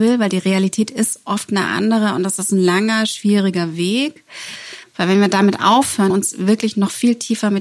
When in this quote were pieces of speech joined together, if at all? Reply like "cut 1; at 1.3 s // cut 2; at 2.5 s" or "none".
cut 1; at 4.8 s // cut 2; at 6.1 s

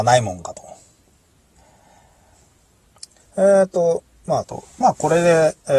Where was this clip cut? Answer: cut 1; at 3.2 s // cut 2; at 4.4 s

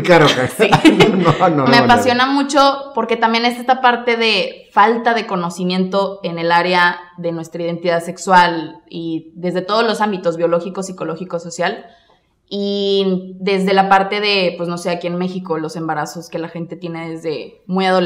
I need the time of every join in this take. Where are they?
cut 1; at 1.7 s

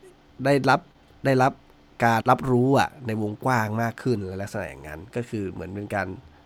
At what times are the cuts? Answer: cut 1; at 2.2 s

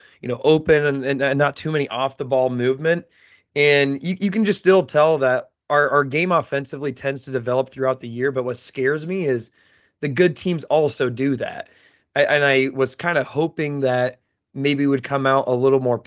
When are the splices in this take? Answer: none

